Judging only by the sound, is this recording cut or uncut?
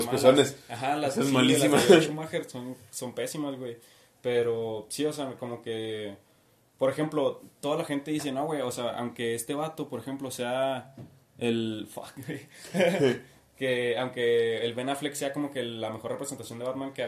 uncut